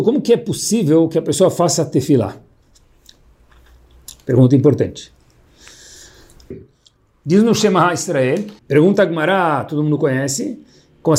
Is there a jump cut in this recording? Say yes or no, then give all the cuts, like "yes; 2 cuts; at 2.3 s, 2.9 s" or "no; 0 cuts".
yes; 2 cuts; at 6.5 s, 8.6 s